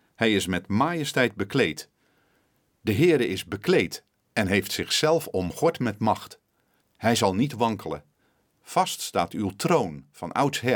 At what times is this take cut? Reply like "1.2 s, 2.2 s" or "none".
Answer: 6.8 s